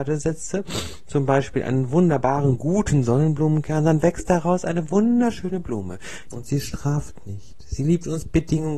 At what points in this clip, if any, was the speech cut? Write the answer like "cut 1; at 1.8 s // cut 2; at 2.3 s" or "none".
cut 1; at 6.3 s

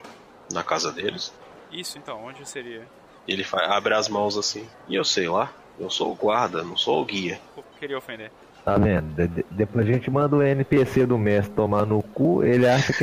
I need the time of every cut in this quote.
cut 1; at 7.6 s

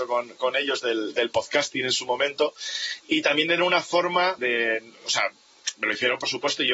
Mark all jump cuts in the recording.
cut 1; at 4.4 s

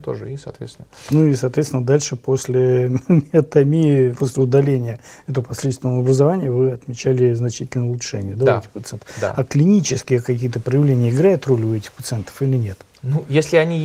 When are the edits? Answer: cut 1; at 4.1 s

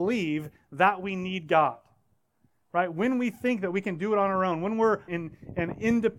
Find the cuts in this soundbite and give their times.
cut 1; at 5.1 s

